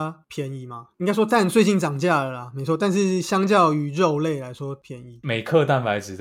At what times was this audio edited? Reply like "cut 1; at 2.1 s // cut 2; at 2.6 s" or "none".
none